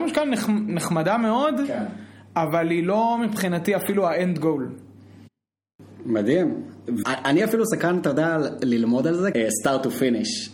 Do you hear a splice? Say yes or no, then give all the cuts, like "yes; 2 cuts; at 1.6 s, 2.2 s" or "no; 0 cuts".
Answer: yes; 2 cuts; at 7.0 s, 9.3 s